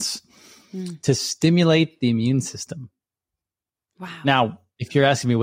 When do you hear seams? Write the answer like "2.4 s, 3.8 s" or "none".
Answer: none